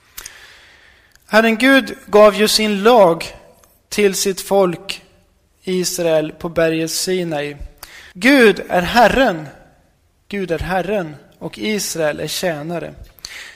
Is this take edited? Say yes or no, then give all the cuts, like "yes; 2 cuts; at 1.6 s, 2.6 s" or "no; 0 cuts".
yes; 1 cut; at 8.1 s